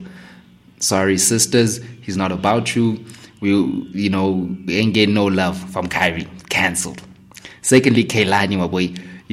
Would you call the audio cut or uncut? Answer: uncut